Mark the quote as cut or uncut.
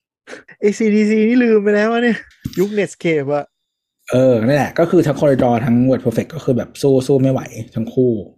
uncut